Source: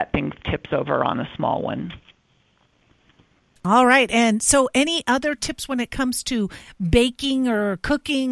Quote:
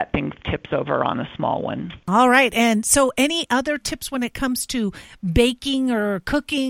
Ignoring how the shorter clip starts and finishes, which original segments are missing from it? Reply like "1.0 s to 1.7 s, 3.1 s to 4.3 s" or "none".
2.0 s to 3.6 s